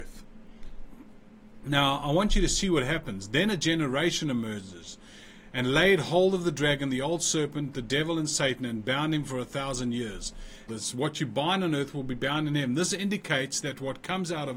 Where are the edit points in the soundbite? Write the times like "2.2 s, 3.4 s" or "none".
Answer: 10.7 s

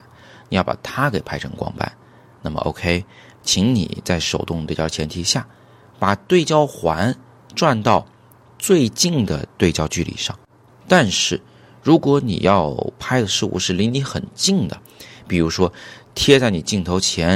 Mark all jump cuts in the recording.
10.7 s

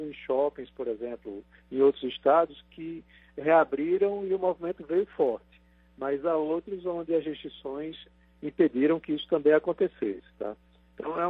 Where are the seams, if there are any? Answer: none

